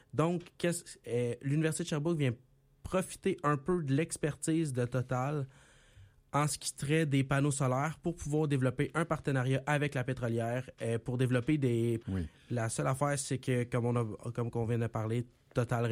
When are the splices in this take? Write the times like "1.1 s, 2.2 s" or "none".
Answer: 12.0 s